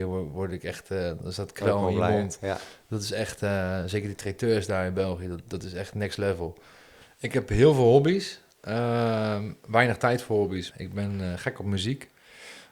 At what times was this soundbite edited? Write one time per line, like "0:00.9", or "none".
0:07.0
0:10.7

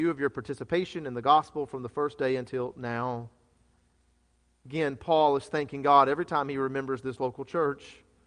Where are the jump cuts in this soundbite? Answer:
none

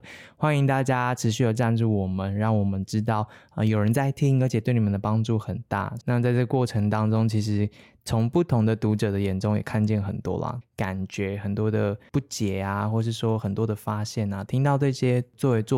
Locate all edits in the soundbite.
0:06.0
0:10.6
0:14.5

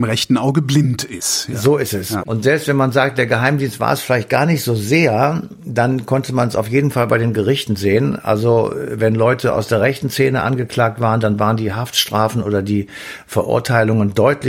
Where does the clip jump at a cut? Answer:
0:02.2

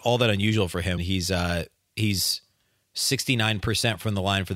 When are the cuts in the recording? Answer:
0:01.0

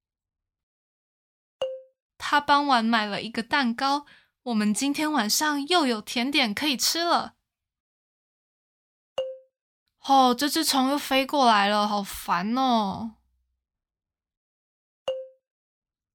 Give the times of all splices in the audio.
0:02.1
0:09.9

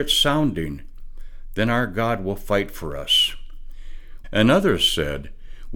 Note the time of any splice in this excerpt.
0:04.2

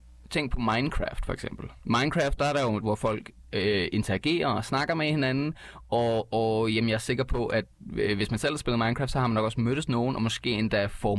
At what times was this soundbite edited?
0:02.8

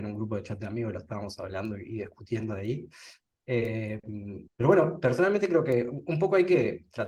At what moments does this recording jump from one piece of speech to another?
0:04.5

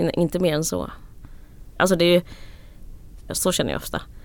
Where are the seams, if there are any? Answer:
0:01.8
0:03.3

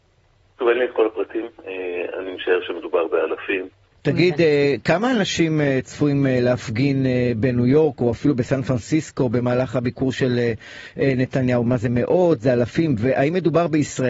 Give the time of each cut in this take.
0:03.9

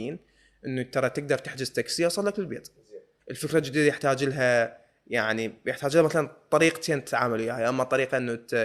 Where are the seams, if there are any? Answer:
0:03.2

